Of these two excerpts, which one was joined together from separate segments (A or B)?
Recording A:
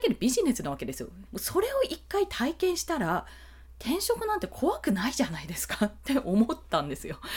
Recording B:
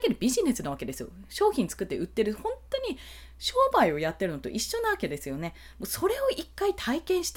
A